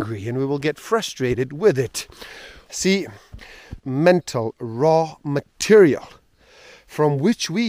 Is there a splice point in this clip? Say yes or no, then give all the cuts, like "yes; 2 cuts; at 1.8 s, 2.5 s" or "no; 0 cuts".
yes; 2 cuts; at 2.7 s, 3.8 s